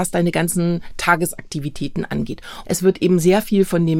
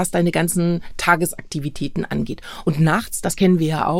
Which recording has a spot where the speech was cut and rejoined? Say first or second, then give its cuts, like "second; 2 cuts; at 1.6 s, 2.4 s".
first; 1 cut; at 2.6 s